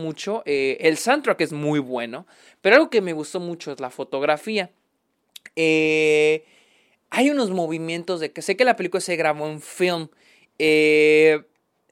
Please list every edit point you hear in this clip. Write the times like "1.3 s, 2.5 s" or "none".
none